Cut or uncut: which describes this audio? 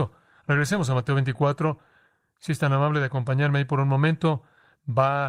uncut